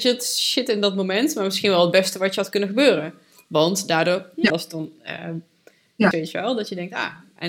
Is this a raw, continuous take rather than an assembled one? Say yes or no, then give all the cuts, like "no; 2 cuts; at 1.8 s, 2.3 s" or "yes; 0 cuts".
no; 2 cuts; at 4.5 s, 6.1 s